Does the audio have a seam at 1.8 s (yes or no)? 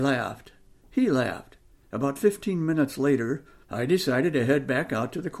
yes